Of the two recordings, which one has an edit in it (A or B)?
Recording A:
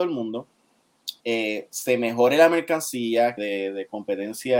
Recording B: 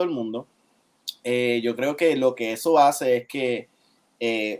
A